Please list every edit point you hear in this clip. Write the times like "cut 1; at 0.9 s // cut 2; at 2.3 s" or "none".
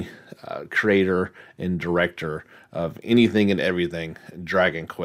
none